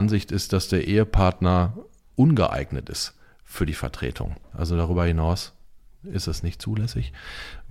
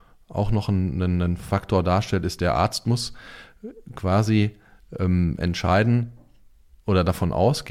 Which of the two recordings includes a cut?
first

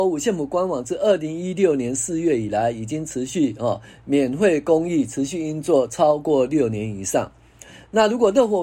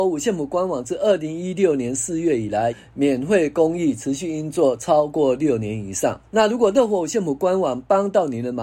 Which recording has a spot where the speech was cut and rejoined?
second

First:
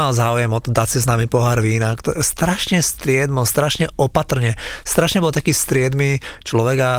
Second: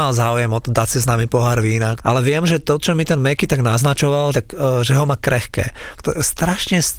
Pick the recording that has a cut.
second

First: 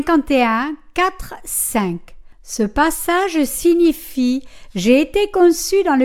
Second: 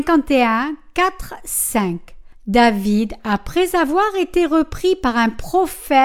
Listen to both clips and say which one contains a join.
second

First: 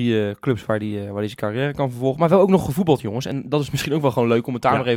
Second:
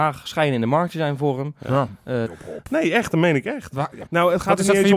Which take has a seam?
second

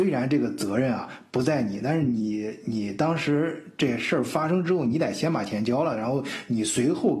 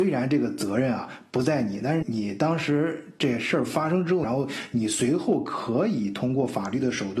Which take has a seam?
second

